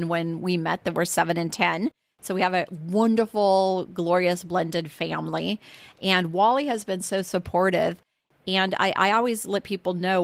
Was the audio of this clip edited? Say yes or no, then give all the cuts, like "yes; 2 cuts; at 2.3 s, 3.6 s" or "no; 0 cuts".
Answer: no; 0 cuts